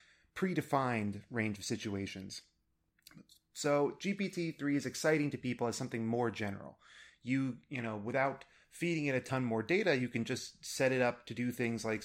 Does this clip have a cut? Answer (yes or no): no